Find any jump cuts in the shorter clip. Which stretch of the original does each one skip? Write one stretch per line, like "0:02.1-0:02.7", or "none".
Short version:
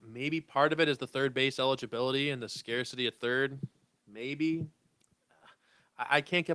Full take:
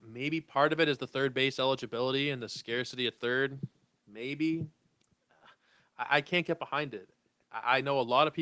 none